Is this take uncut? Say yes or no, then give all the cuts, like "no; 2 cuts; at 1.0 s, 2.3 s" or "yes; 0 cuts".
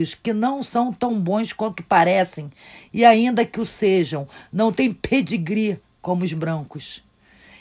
yes; 0 cuts